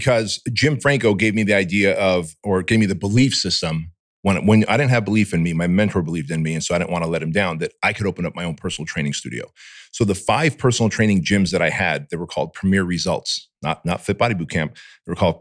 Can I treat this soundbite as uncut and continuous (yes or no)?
yes